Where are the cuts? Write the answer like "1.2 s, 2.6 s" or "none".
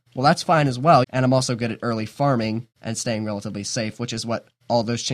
1.0 s, 2.7 s